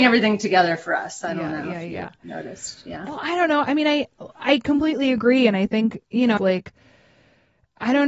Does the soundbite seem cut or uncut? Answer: cut